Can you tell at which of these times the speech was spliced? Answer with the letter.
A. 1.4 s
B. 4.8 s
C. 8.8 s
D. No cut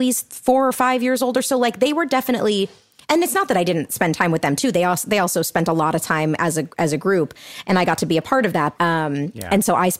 C